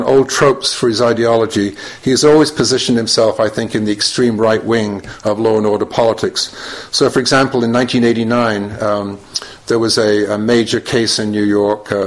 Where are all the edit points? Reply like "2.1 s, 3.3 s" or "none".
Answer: none

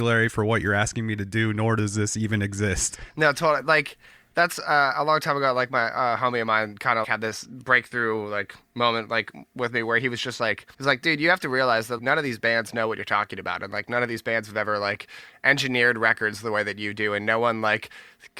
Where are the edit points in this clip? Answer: 7.0 s, 10.7 s, 12.0 s

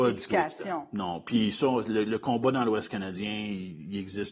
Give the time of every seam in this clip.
none

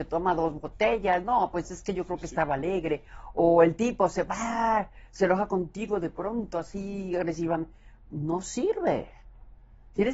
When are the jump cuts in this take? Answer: none

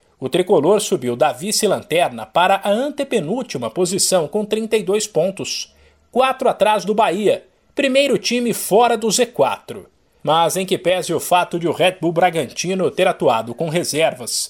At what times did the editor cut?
none

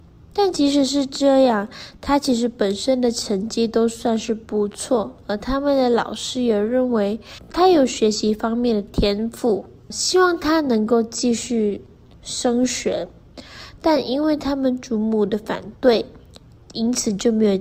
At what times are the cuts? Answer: none

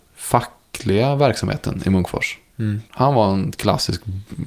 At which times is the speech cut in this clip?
2.9 s

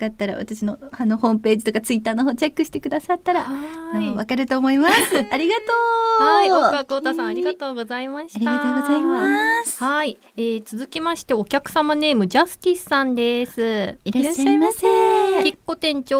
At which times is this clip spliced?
none

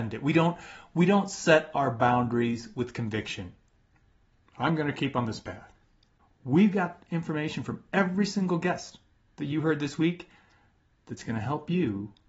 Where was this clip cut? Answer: 4.4 s

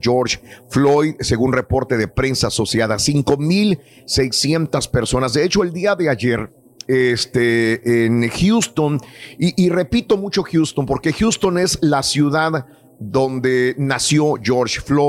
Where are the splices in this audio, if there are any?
none

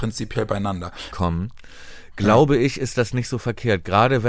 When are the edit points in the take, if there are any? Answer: 1.1 s

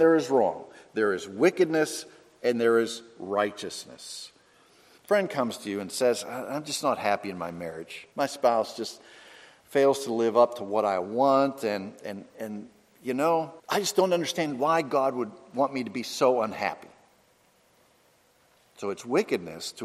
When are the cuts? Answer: 5.0 s, 8.1 s, 13.6 s

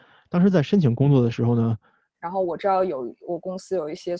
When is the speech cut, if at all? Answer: 2.1 s

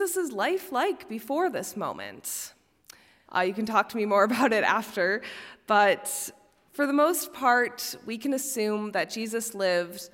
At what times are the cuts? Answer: 3.3 s

